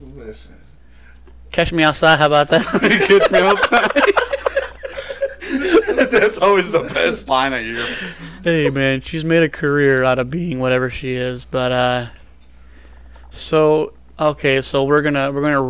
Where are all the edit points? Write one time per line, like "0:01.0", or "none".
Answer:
none

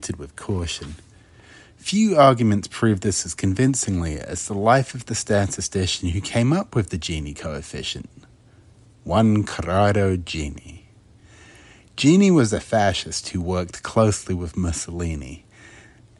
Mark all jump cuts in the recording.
none

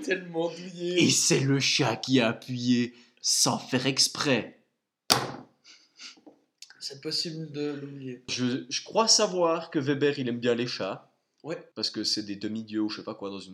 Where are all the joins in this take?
0:08.3
0:11.7

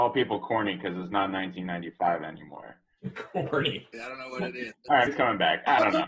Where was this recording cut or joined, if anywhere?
0:03.9
0:05.1

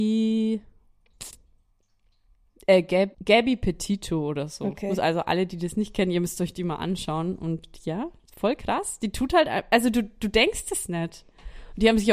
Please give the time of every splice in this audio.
0:03.1

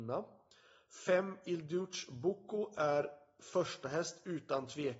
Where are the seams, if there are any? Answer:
none

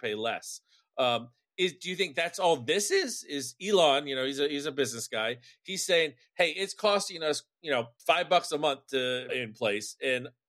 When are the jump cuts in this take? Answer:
0:08.0
0:09.3

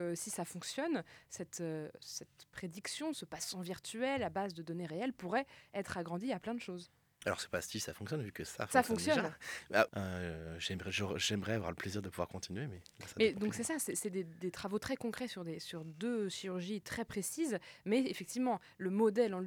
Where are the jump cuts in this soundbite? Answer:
0:09.9

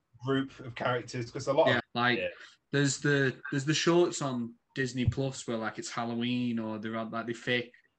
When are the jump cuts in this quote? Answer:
0:01.8

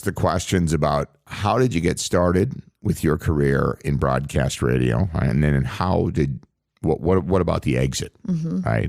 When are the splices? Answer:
none

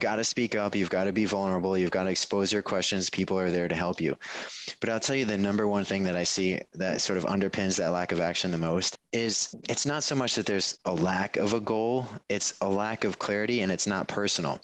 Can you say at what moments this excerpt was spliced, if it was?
none

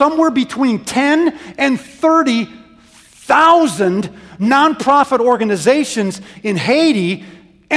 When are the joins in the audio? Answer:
none

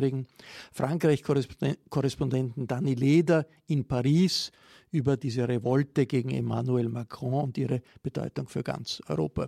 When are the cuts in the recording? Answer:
none

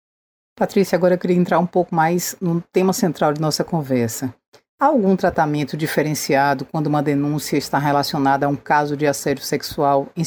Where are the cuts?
none

